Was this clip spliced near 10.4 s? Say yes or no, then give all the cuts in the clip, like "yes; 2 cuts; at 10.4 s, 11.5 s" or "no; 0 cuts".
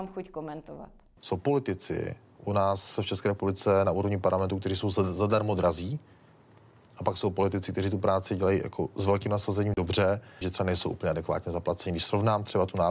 yes; 1 cut; at 10.4 s